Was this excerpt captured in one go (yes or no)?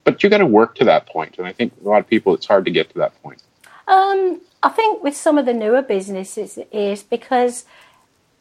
yes